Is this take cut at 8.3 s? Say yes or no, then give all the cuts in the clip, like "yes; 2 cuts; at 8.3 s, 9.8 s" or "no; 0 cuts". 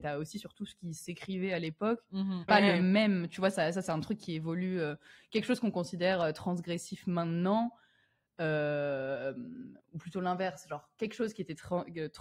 no; 1 cut; at 2.5 s